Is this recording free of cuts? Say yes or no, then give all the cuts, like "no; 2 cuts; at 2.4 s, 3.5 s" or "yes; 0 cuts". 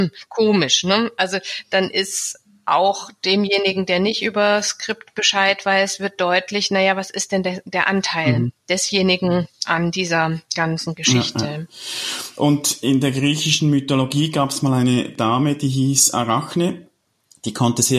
yes; 0 cuts